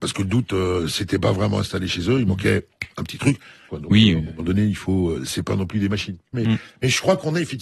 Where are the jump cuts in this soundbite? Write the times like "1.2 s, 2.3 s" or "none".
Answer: 3.7 s, 6.3 s